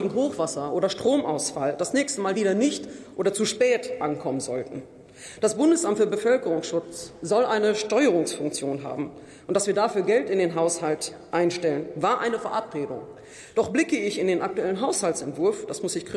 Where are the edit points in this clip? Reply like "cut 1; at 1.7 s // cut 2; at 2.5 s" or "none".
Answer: none